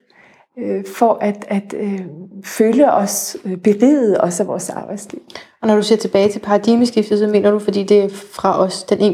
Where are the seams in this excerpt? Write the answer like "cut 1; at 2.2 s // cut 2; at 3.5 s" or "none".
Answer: none